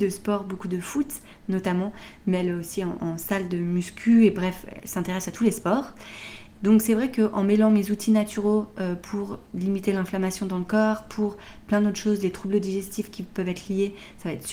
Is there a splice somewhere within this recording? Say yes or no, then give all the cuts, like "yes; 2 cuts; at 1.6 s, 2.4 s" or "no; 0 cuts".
yes; 1 cut; at 6.5 s